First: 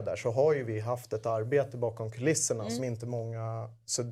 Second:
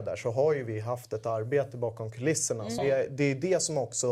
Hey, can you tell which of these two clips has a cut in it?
second; 1 cut; at 2.8 s

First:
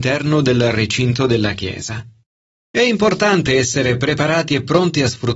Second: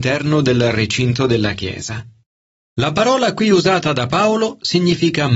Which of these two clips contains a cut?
first; 1 cut; at 2.5 s

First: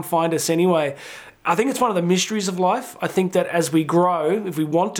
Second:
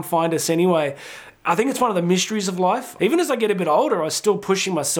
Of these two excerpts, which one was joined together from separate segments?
second; 1 cut; at 3.0 s

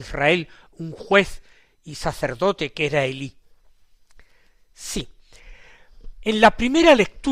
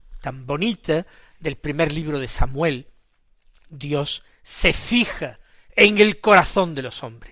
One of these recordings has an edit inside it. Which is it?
first; 1 cut; at 6.1 s

